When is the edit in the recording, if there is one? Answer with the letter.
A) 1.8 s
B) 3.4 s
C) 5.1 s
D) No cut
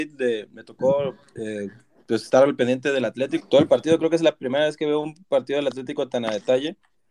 B